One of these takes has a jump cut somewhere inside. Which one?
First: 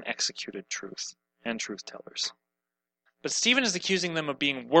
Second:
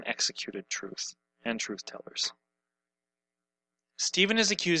first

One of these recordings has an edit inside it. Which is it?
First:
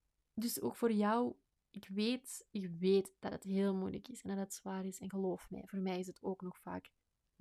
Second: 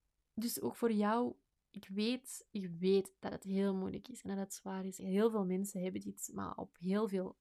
second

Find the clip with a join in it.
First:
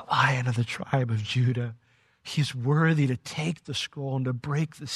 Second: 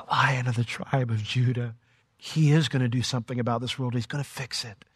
second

